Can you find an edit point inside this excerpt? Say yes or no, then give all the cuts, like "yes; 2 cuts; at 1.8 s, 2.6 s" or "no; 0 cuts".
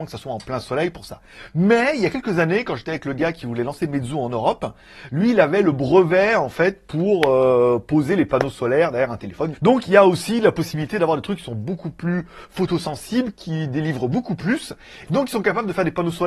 yes; 2 cuts; at 9.5 s, 15.0 s